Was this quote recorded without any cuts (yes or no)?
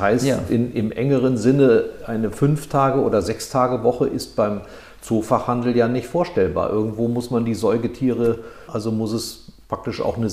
no